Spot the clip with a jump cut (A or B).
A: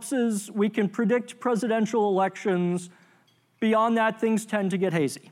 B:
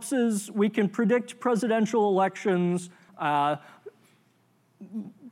B